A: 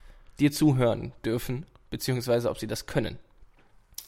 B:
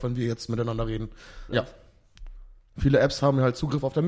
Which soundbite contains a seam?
B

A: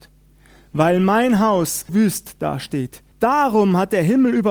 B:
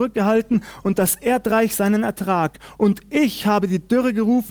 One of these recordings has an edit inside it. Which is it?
A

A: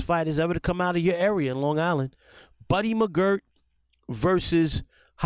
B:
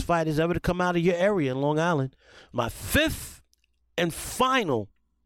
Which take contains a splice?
B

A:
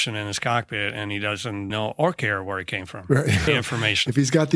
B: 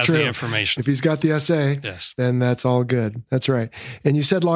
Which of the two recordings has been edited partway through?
A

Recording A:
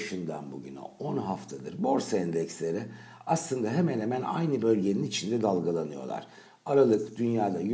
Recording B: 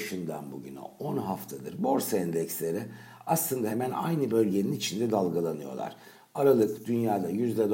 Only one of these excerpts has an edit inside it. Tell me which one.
B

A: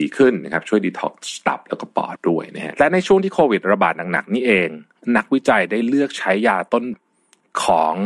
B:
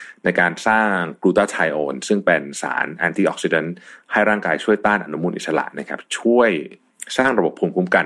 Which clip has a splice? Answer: A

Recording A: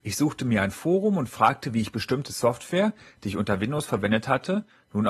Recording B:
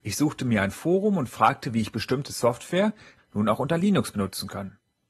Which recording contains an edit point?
B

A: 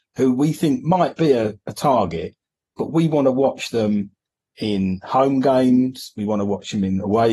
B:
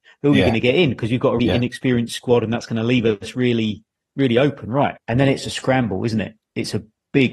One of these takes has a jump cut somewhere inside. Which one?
B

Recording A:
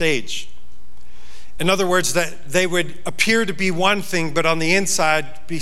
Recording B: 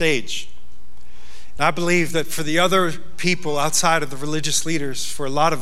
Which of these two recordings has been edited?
B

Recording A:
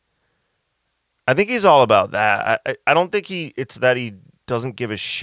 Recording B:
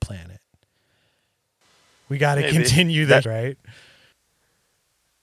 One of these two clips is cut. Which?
B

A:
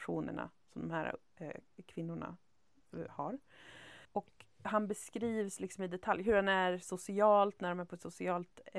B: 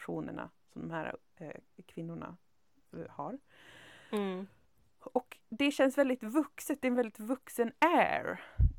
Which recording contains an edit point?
A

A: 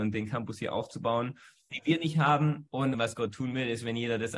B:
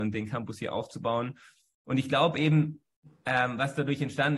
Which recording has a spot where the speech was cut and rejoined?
A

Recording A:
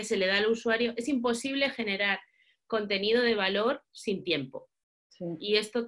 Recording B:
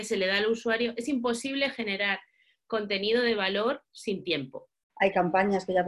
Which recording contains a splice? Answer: B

